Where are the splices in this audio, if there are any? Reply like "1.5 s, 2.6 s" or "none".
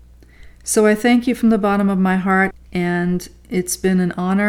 2.5 s